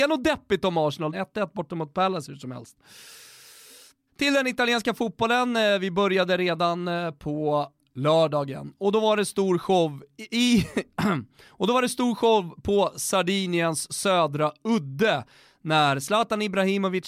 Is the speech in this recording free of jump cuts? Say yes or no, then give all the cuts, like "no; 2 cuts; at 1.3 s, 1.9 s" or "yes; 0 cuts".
no; 1 cut; at 1.1 s